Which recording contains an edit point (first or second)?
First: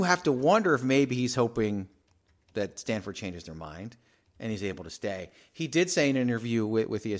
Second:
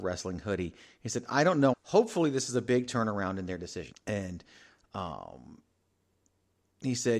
second